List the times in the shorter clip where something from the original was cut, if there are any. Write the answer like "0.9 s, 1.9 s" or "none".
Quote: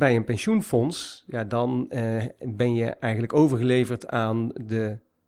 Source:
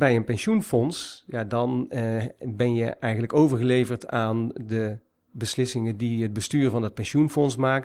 none